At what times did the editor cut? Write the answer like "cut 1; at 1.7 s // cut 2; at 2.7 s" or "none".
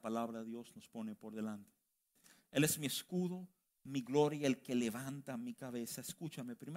none